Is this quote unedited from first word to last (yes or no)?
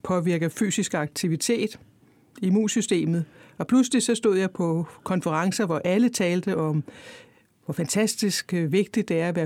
yes